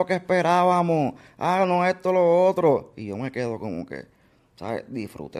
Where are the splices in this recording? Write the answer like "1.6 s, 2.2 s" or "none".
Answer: none